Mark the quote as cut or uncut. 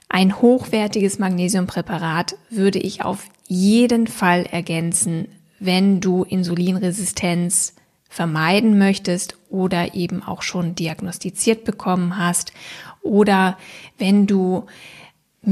uncut